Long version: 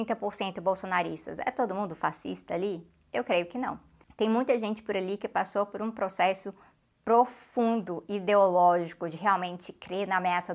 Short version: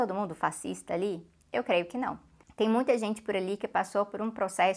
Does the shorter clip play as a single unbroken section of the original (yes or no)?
yes